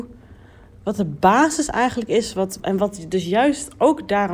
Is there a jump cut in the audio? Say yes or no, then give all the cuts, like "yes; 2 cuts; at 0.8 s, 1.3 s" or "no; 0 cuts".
yes; 1 cut; at 2.6 s